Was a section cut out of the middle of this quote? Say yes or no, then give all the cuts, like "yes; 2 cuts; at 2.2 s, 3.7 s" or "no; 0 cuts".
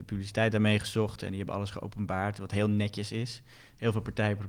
no; 0 cuts